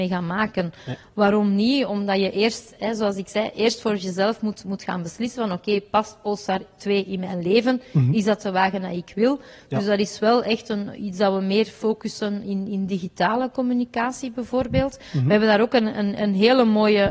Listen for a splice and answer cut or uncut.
uncut